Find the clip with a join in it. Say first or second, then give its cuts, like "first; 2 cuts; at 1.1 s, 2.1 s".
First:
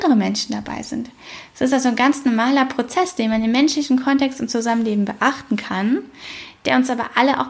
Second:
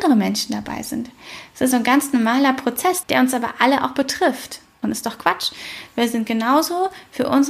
second; 3 cuts; at 1.7 s, 3.0 s, 4.8 s